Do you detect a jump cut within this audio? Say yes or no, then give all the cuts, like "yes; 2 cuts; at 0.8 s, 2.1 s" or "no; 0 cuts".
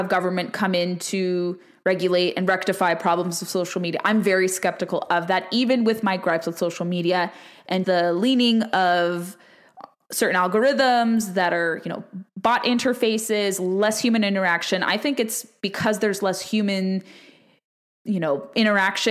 yes; 1 cut; at 7.8 s